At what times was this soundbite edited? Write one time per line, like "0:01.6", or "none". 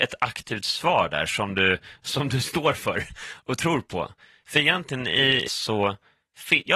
0:05.5

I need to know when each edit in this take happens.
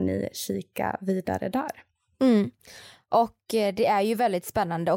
none

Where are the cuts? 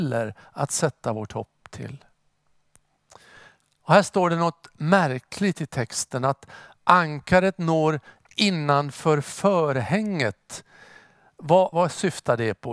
0:11.7

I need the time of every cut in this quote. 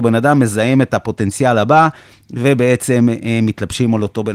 none

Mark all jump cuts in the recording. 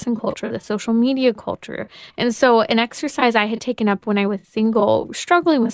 0:02.1

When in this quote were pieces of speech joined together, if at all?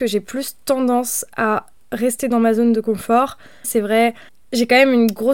0:03.6

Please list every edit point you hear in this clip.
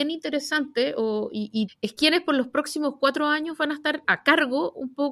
0:01.7
0:04.0

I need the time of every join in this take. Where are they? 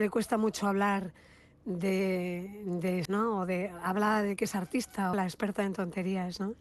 0:03.1
0:05.1

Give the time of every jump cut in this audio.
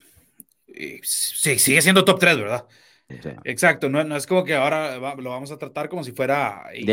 0:03.1

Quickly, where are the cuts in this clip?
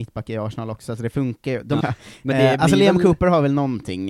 0:01.8

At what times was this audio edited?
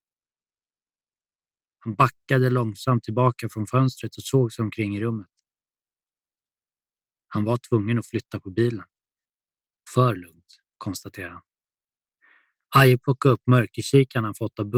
0:09.9

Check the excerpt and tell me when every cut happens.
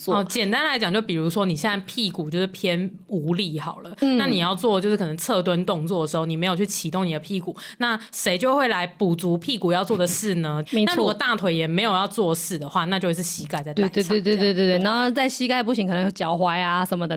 0:10.6

